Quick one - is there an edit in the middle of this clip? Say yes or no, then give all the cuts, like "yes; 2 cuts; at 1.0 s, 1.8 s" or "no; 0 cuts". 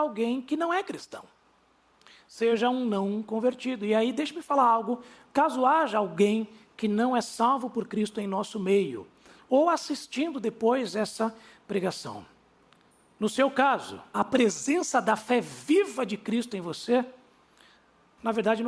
yes; 1 cut; at 14.1 s